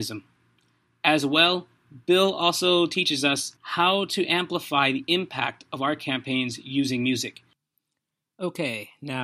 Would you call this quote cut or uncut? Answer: uncut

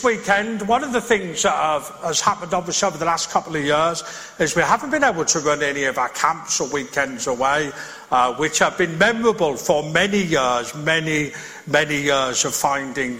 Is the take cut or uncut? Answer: uncut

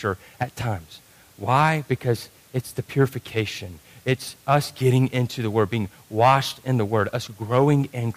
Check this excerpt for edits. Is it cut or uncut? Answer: uncut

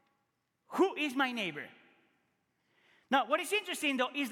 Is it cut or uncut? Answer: uncut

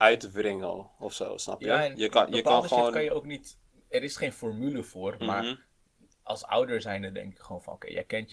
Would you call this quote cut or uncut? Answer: uncut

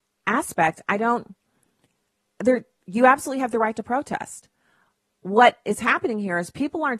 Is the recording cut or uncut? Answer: uncut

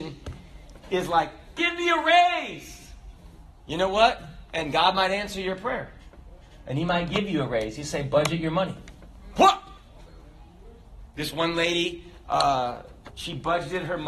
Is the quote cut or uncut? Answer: cut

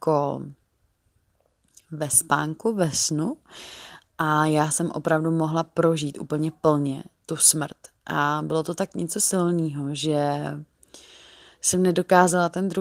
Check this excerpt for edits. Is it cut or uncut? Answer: uncut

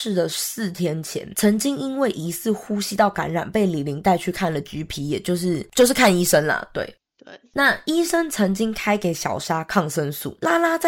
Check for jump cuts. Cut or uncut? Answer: uncut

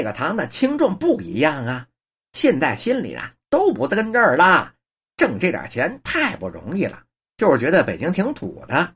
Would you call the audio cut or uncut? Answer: cut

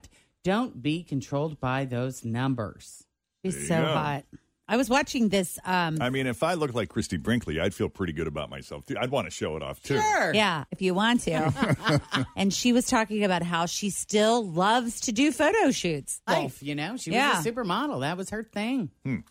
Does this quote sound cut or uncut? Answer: cut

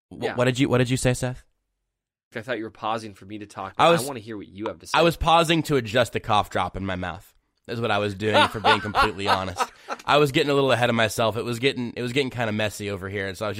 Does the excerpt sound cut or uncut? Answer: cut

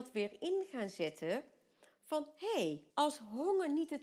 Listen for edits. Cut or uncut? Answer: cut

